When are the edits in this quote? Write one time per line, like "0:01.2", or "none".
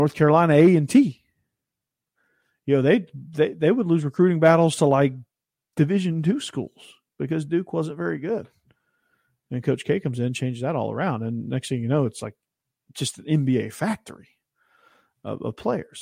none